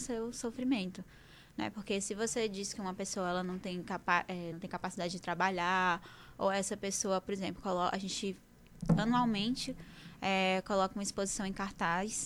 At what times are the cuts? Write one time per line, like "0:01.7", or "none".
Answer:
none